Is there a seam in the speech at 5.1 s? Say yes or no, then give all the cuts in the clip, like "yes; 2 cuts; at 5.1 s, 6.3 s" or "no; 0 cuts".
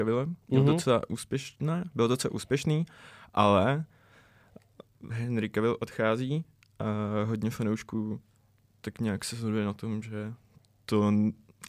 yes; 1 cut; at 5.1 s